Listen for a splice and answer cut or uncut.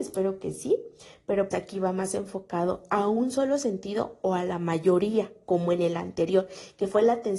cut